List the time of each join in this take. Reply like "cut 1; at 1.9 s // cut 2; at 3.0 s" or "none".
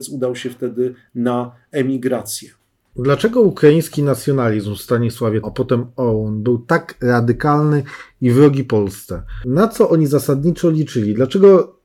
cut 1; at 5.4 s

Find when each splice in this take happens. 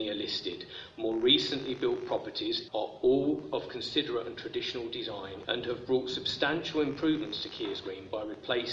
cut 1; at 2.7 s // cut 2; at 5.4 s

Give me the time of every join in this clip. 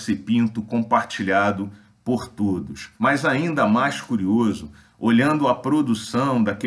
cut 1; at 2.9 s

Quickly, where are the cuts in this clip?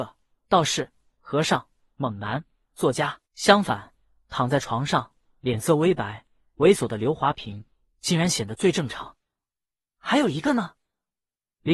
cut 1; at 3.3 s

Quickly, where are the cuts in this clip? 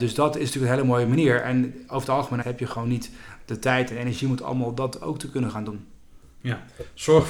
cut 1; at 2.4 s

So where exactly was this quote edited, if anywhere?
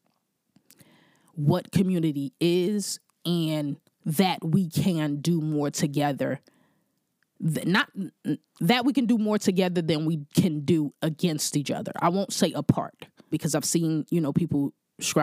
cut 1; at 13.3 s

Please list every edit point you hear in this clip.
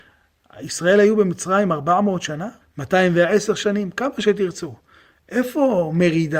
cut 1; at 2.6 s

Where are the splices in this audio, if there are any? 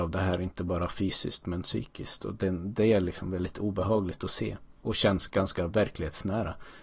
none

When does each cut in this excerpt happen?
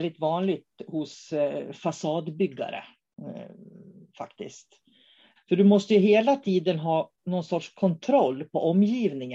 cut 1; at 5.4 s

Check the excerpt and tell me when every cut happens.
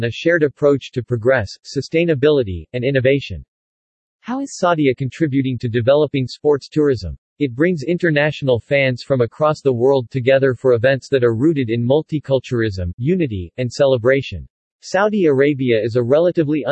cut 1; at 7.3 s // cut 2; at 14.7 s

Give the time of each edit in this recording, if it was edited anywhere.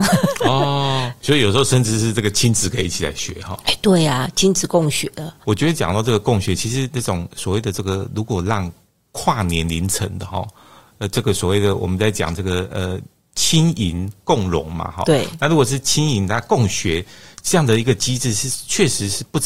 none

